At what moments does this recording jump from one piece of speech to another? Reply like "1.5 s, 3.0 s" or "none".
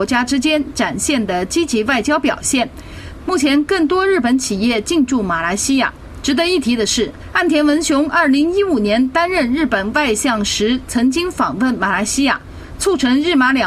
3.2 s